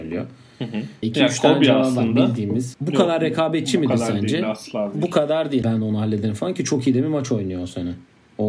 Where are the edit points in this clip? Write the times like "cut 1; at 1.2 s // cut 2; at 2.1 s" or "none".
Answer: cut 1; at 1.0 s // cut 2; at 2.7 s // cut 3; at 5.6 s

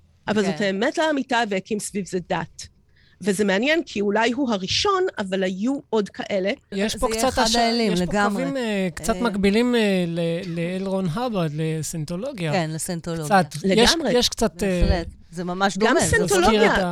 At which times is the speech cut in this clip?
cut 1; at 6.7 s

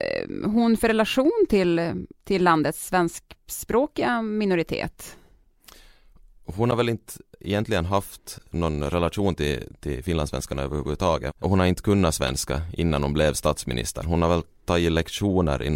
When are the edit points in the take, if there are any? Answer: none

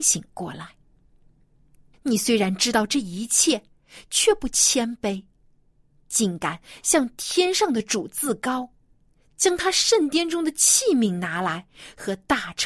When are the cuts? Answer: cut 1; at 1.9 s

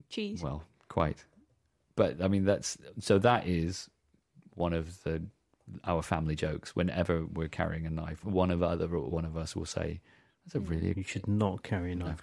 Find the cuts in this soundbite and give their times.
cut 1; at 8.2 s // cut 2; at 10.9 s

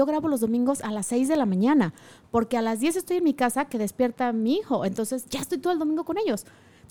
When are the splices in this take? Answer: none

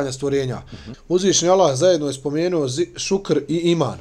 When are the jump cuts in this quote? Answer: cut 1; at 0.9 s

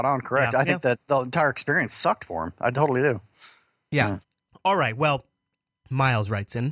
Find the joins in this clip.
cut 1; at 4.2 s

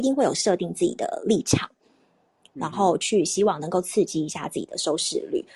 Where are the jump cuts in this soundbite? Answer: none

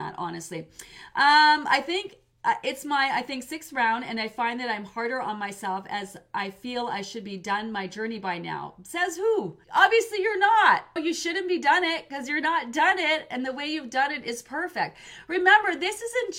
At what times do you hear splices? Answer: cut 1; at 9.6 s // cut 2; at 11.0 s

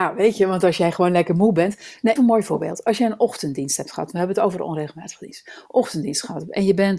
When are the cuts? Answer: cut 1; at 2.2 s

